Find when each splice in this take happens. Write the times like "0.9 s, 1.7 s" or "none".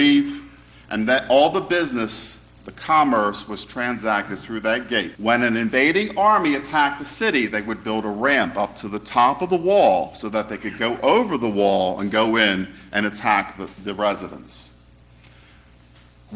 5.1 s